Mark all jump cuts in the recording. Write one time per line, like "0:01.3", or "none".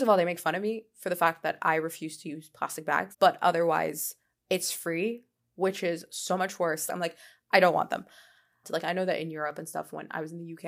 0:03.1
0:06.9
0:08.6